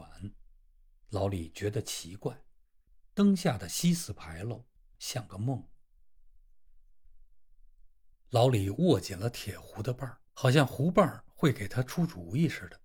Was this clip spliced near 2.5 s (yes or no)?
no